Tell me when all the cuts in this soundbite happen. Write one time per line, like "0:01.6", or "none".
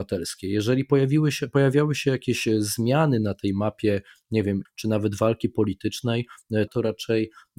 0:04.7
0:06.7